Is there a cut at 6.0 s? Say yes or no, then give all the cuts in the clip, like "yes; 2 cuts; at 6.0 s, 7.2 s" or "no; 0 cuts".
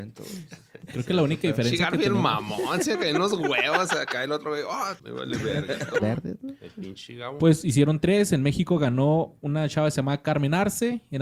yes; 2 cuts; at 5.0 s, 6.0 s